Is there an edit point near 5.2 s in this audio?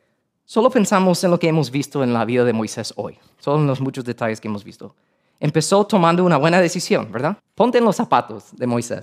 no; 1 cut; at 7.4 s

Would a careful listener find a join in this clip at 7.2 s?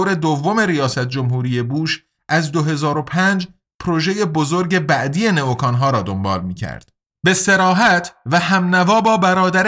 yes; 1 cut; at 7.2 s

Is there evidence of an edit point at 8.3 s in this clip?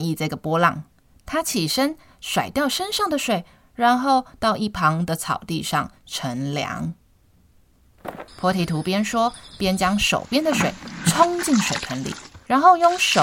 yes; 1 cut; at 8.3 s

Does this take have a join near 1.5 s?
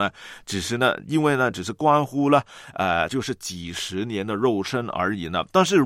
yes; 2 cuts; at 1.5 s, 3.1 s

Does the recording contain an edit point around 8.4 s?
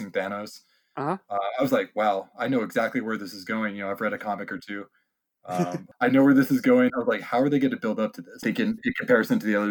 yes; 2 cuts; at 6.9 s, 8.4 s

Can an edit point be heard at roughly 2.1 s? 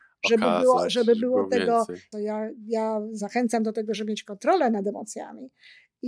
yes; 1 cut; at 2.1 s

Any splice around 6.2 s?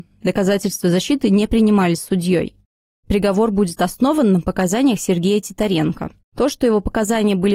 yes; 1 cut; at 6.2 s

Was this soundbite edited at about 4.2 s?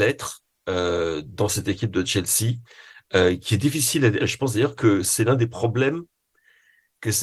yes; 1 cut; at 4.2 s

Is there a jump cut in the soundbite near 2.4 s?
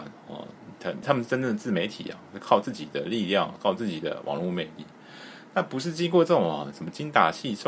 no; 1 cut; at 1.0 s

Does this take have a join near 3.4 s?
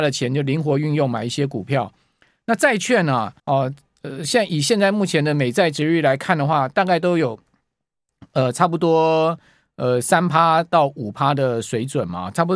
yes; 1 cut; at 3.4 s

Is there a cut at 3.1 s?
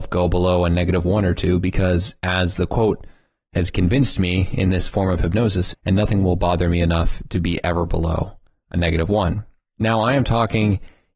no; 1 cut; at 5.7 s

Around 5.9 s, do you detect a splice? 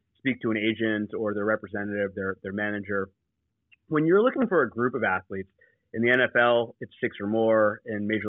no; 0 cuts

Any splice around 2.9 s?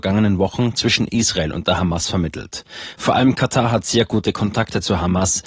no; 0 cuts

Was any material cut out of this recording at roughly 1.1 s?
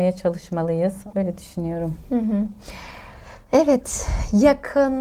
yes; 2 cuts; at 1.1 s, 3.4 s

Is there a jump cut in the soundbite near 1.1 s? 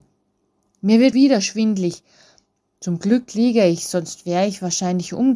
yes; 1 cut; at 1.1 s

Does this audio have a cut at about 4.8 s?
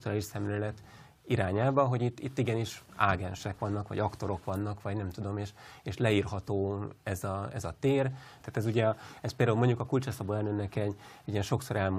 no; 1 cut; at 8.4 s

